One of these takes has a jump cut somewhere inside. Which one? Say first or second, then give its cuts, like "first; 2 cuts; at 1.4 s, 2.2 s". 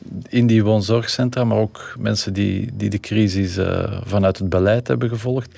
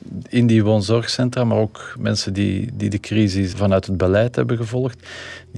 second; 1 cut; at 3.5 s